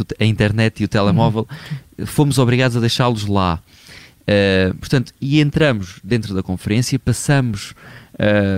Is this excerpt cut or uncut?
uncut